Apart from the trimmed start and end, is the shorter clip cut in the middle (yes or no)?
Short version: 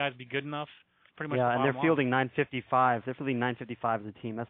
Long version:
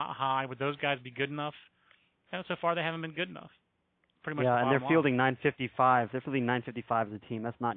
yes